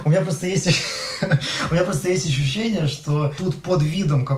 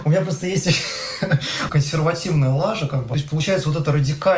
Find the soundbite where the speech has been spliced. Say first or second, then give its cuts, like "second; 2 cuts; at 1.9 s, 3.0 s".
second; 1 cut; at 1.7 s